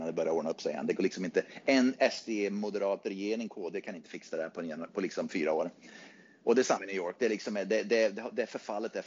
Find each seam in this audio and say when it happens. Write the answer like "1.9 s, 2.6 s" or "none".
none